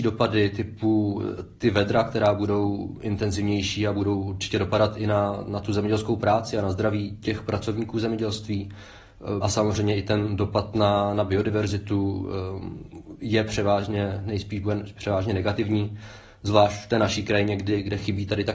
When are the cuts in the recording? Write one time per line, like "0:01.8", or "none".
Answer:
0:09.4